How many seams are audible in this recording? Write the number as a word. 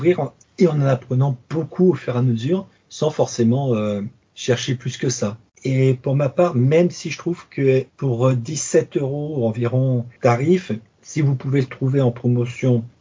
two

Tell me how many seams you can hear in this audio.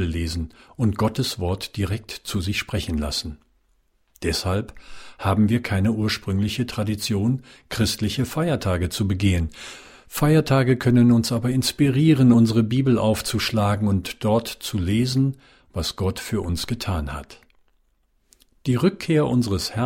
zero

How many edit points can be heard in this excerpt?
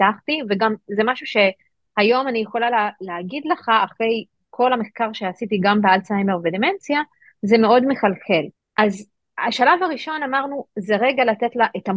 one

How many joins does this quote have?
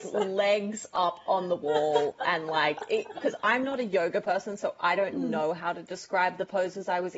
one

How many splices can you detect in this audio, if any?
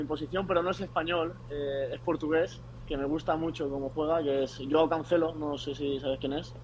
zero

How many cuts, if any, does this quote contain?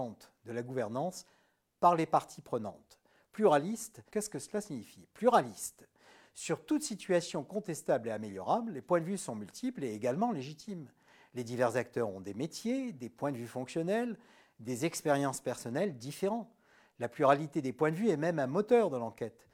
one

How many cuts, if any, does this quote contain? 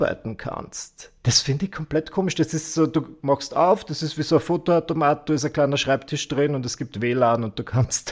zero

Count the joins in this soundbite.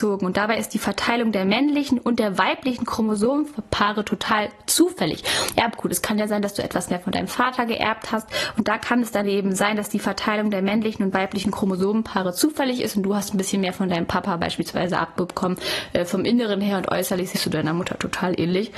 one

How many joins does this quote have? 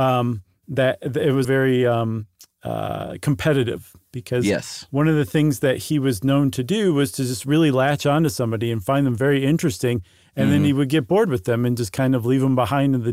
one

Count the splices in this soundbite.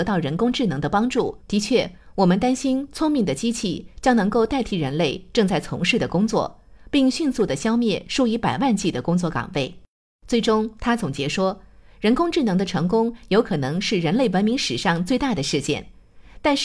one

